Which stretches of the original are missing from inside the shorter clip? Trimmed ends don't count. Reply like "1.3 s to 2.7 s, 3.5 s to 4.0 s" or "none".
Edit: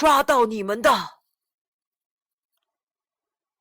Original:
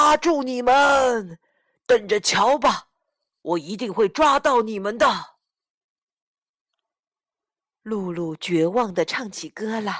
none

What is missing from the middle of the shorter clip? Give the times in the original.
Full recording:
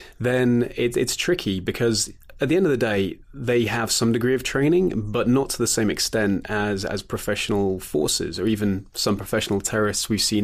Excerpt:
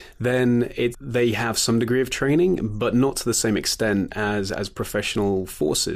0.9 s to 3.2 s

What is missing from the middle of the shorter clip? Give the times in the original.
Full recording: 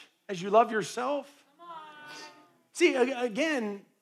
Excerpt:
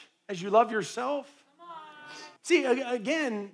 2.4 s to 2.7 s

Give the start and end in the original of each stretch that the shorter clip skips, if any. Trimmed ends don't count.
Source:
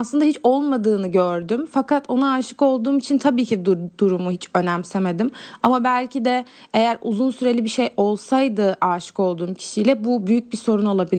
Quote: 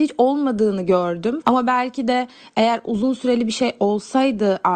1.7 s to 5.6 s

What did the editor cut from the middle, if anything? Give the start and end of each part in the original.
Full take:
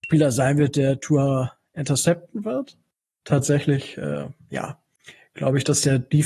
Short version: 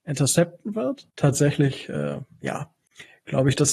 2.8 s to 3.2 s

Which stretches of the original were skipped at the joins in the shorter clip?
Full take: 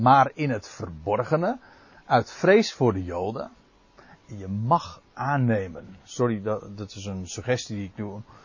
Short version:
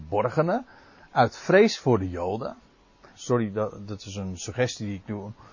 4.1 s to 6.0 s

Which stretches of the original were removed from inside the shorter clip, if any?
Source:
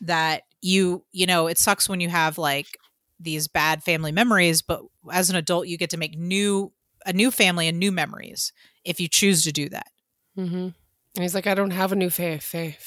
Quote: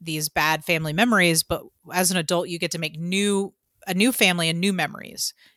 none

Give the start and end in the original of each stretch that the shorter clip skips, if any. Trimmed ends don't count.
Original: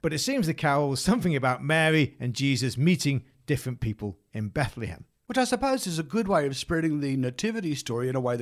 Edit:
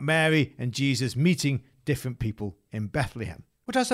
none

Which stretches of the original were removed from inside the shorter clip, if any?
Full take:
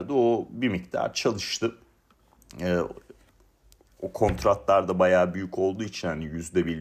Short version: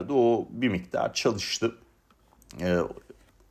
none

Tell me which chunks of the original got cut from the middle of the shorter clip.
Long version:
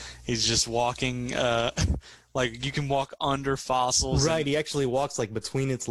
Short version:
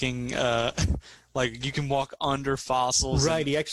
none

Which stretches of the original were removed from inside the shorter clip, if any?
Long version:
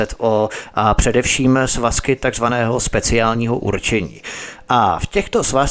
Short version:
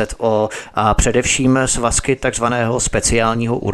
none

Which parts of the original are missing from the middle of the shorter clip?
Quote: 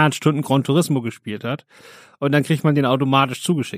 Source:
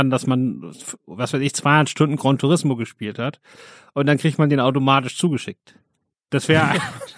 none

